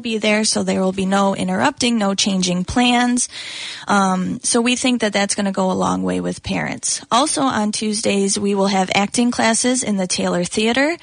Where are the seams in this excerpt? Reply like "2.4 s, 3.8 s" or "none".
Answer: none